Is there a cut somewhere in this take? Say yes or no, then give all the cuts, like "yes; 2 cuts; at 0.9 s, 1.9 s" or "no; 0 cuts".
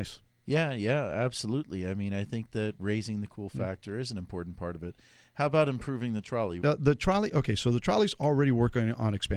yes; 1 cut; at 6.6 s